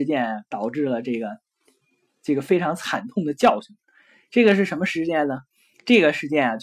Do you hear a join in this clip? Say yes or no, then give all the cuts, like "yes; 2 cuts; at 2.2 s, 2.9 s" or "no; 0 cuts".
no; 0 cuts